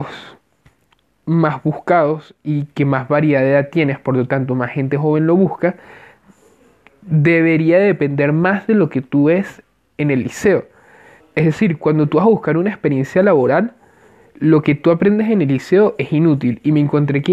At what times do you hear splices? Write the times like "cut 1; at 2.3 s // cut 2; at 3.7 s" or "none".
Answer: cut 1; at 11.2 s